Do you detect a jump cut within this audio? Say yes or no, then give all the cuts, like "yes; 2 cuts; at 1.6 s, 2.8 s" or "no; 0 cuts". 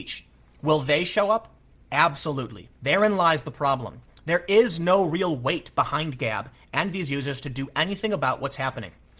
yes; 1 cut; at 2.8 s